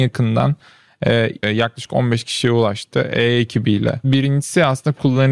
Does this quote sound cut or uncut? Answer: cut